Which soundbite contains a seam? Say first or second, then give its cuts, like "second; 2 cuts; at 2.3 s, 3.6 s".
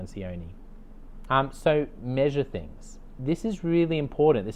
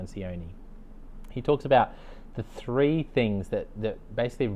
first; 2 cuts; at 1.3 s, 3.2 s